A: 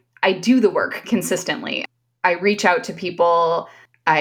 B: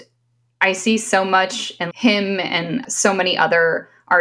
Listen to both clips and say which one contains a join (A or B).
B